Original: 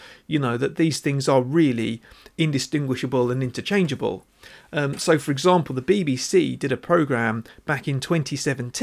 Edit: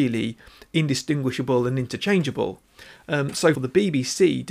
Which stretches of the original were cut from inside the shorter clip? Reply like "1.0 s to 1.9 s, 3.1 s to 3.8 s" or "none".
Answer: 5.2 s to 5.7 s